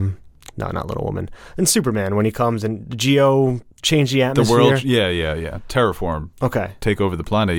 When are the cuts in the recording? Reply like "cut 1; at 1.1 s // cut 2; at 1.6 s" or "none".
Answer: cut 1; at 3.7 s // cut 2; at 6.3 s